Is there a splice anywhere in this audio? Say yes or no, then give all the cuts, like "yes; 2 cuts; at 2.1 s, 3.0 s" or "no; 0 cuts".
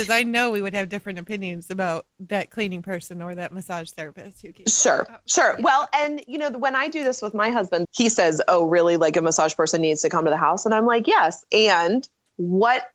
yes; 1 cut; at 7.8 s